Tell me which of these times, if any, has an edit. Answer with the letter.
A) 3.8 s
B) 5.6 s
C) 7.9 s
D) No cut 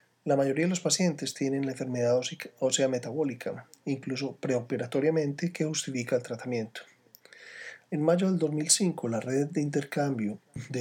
C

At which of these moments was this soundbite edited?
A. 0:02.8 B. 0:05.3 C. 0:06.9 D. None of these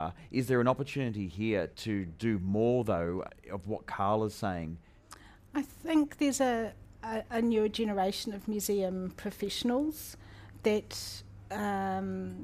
D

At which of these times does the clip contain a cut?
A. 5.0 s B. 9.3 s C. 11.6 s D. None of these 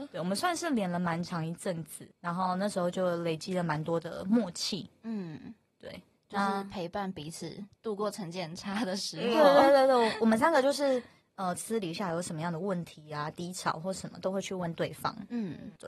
C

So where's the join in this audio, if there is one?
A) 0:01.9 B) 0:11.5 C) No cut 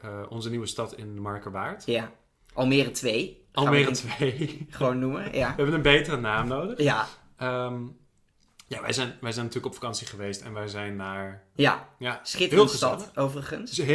B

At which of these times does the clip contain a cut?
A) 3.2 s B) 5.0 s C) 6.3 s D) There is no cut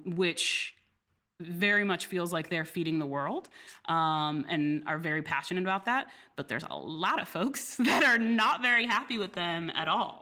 D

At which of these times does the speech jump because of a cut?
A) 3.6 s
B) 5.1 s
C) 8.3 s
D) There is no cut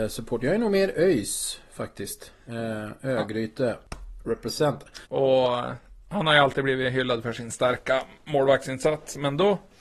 B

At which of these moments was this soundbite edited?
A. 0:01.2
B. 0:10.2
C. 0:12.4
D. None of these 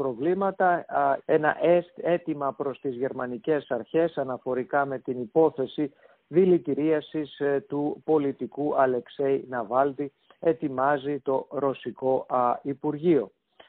A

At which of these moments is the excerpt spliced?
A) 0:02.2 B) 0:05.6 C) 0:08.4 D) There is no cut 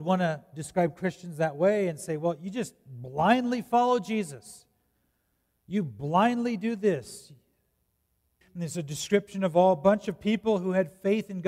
C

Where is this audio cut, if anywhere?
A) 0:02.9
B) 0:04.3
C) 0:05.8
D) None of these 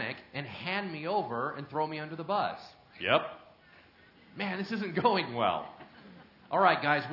D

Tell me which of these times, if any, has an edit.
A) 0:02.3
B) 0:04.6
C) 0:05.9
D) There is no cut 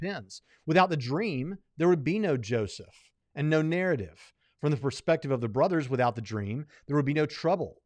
D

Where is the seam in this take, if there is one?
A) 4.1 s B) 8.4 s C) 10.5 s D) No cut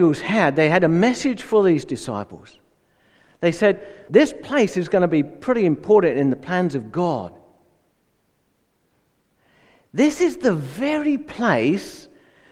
A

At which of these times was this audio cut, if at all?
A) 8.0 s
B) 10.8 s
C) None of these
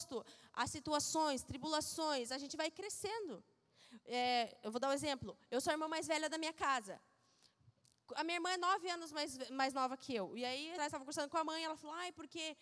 B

